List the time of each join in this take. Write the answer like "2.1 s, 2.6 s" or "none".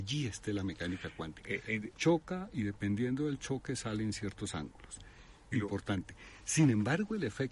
1.9 s, 5.5 s

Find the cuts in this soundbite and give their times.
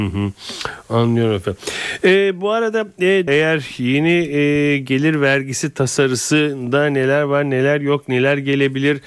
3.3 s

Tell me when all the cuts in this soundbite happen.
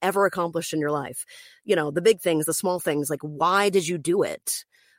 none

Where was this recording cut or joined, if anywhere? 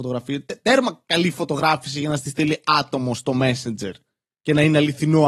none

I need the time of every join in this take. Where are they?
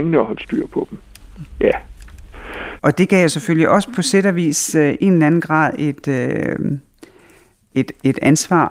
2.8 s

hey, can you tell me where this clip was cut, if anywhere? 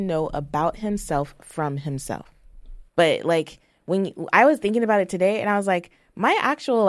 2.9 s

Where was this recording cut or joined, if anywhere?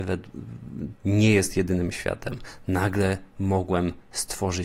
0.9 s

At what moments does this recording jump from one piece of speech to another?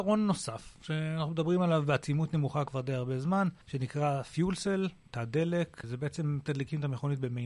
3.6 s, 5.8 s

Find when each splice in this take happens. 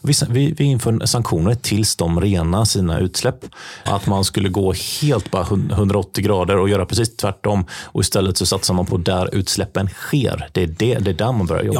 3.9 s

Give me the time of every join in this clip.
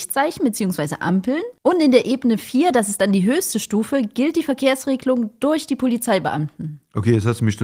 none

